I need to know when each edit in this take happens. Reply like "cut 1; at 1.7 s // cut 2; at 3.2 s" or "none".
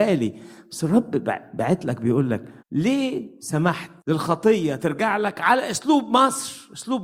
cut 1; at 2.6 s // cut 2; at 4.0 s

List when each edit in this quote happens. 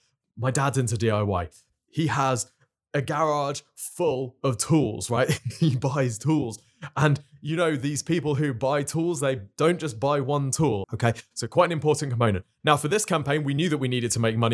cut 1; at 10.8 s

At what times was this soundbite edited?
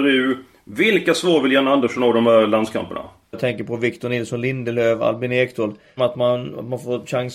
cut 1; at 3.3 s // cut 2; at 6.0 s

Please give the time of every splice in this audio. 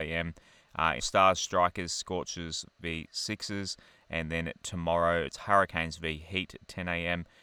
cut 1; at 1.0 s

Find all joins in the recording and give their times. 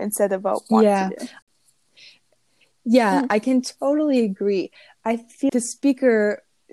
cut 1; at 5.5 s

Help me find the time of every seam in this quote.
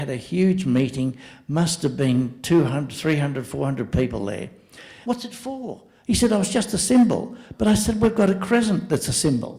cut 1; at 5.0 s

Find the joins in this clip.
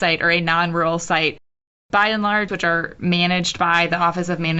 cut 1; at 2.5 s

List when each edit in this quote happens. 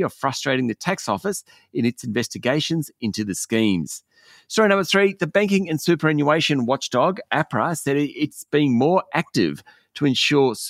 none

